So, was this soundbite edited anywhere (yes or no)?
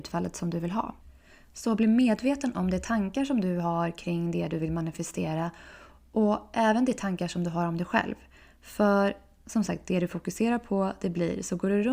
no